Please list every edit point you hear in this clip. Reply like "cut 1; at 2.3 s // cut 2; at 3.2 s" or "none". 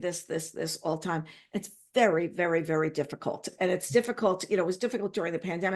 none